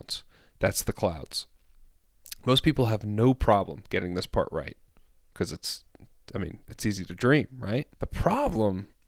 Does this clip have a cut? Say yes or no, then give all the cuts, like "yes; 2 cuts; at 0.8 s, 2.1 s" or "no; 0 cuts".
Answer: yes; 1 cut; at 7.9 s